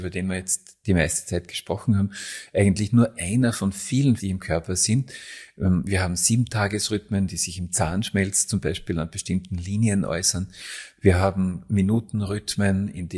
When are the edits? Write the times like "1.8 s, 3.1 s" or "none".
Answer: 4.2 s, 11.0 s